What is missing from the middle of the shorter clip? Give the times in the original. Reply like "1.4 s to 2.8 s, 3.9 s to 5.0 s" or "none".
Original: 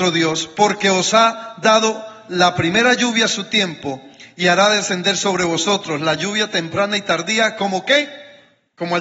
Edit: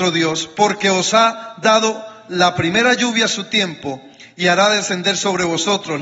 none